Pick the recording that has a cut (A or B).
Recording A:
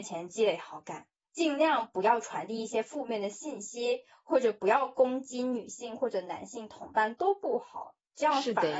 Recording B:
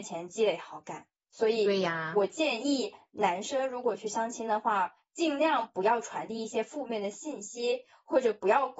A